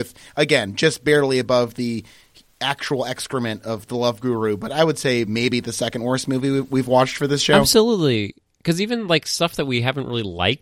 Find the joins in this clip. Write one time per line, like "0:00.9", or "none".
none

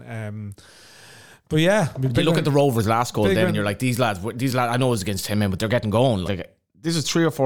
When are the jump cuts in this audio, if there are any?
0:06.3

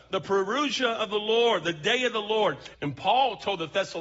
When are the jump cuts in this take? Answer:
0:02.7

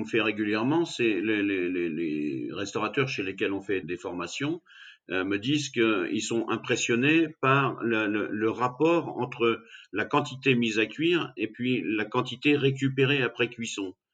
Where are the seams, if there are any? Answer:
0:03.8

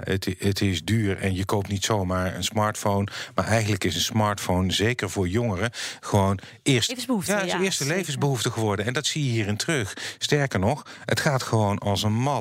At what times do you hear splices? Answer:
0:06.9

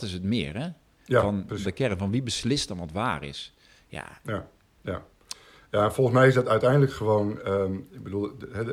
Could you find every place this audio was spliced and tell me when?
0:01.6

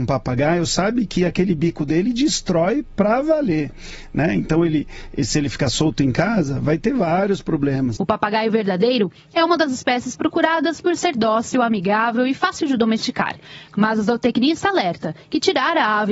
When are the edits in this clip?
0:08.0

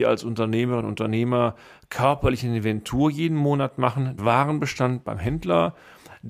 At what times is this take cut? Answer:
0:04.2

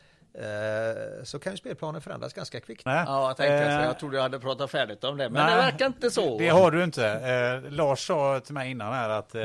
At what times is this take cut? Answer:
0:02.9

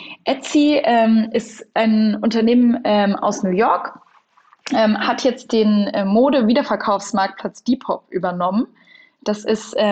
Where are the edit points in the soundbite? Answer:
none

